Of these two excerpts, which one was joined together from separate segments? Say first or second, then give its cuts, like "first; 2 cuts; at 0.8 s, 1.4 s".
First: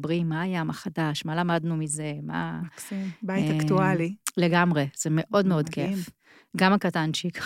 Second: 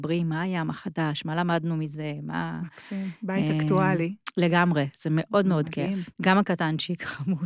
second; 1 cut; at 6.1 s